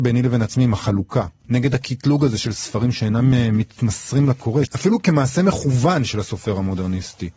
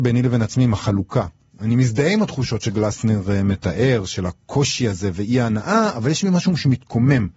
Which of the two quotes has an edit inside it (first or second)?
first